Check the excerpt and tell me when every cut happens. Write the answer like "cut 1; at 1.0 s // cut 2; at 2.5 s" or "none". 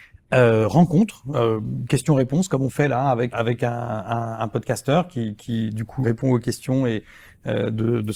cut 1; at 3.3 s // cut 2; at 6.0 s